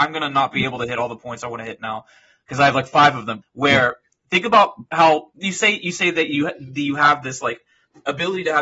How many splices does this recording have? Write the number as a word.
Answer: one